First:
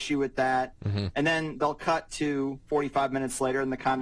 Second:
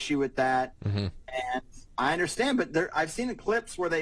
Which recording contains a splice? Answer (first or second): first